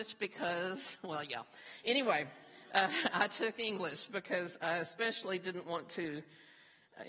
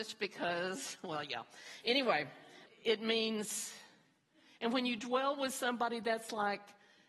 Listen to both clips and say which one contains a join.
second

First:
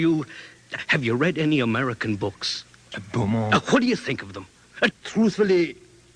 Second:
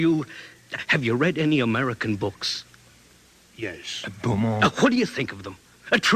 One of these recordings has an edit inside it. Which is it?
first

